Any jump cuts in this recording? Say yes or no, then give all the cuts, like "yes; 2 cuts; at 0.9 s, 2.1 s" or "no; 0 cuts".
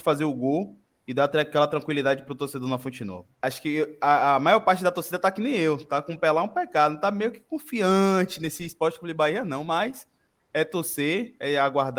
yes; 1 cut; at 3.3 s